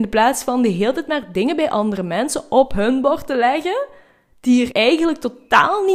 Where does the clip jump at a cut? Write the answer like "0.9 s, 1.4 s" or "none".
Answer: 4.7 s

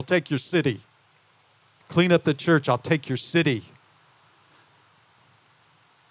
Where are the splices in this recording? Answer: 1.8 s

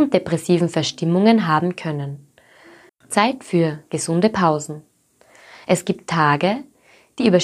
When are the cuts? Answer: 2.9 s

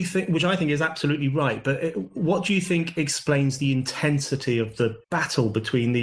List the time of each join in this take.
5.0 s

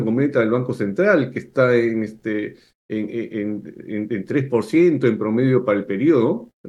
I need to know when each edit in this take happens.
none

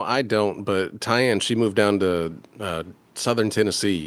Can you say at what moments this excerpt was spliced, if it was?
none

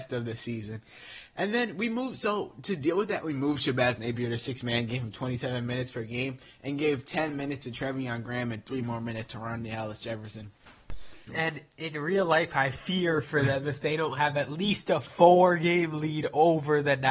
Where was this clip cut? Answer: 11.3 s

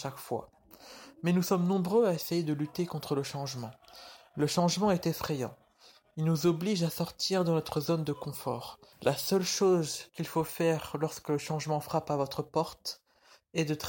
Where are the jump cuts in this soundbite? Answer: 8.9 s, 10.1 s

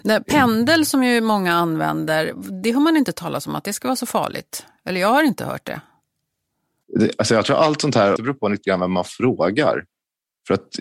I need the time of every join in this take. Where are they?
6.8 s, 8.2 s

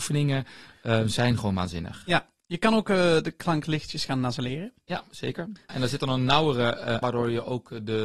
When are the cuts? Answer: 5.7 s, 7.0 s

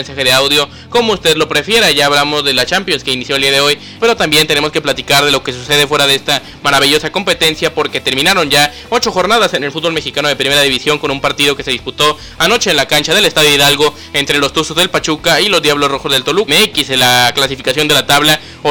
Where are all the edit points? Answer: 4.0 s, 16.5 s

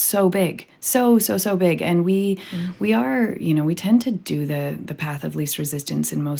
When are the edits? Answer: none

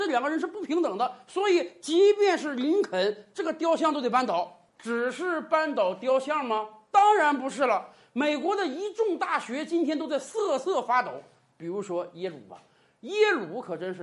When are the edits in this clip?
none

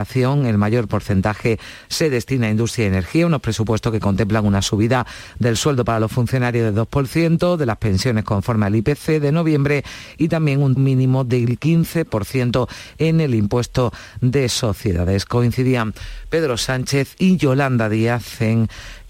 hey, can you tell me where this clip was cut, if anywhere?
10.8 s

